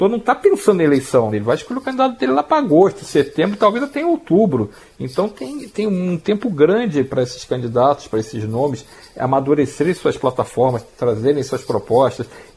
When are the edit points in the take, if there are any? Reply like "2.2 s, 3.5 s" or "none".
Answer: 1.3 s